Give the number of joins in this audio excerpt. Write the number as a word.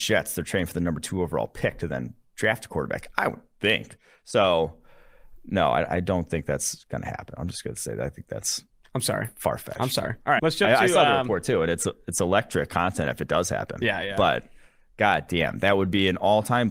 one